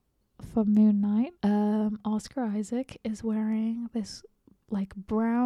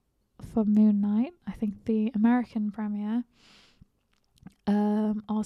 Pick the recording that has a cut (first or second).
first